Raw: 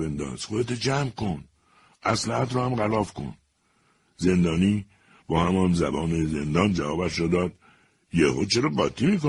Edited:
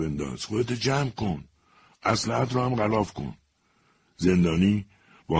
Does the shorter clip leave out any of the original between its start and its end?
no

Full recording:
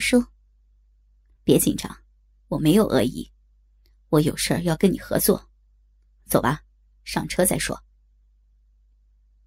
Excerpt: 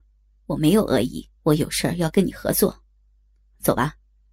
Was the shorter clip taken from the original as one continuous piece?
no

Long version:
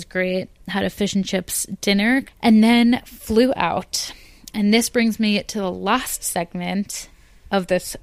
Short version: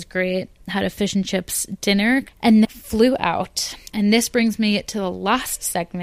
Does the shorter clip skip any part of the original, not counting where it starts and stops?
yes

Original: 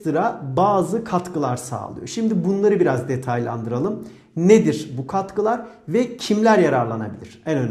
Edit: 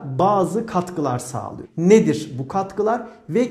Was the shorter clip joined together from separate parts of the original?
yes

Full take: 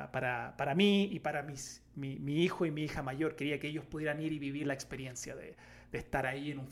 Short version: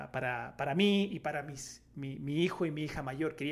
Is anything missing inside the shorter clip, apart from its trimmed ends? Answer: no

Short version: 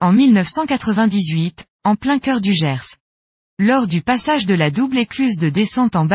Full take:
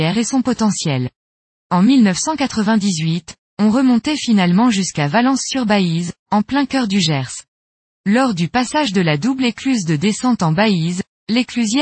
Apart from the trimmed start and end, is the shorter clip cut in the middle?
yes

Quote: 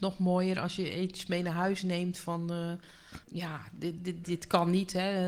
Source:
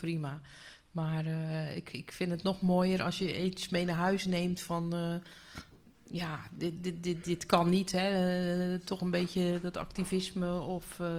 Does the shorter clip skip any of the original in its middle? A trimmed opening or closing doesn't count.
yes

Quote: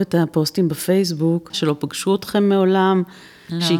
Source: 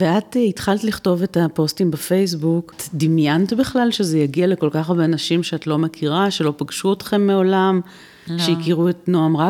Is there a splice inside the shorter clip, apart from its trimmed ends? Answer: yes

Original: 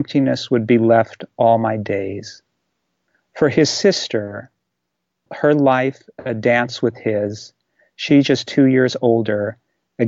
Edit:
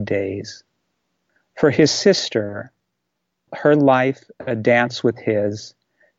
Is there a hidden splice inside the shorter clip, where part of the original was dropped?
no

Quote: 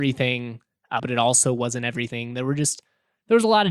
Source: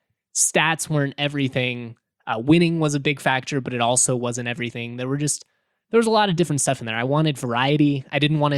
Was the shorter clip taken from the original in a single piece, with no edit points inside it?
no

